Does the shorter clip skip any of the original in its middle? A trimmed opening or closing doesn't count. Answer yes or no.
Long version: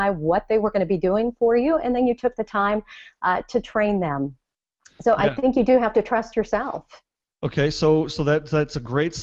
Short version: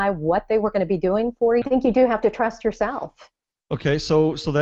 yes